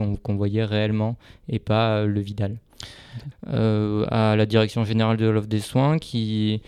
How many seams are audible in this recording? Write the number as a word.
one